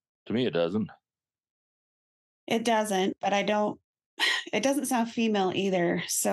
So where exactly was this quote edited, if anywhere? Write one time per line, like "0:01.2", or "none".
none